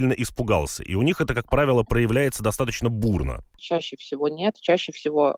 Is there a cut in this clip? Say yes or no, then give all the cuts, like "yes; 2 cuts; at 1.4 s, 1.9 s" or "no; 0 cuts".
yes; 1 cut; at 3.6 s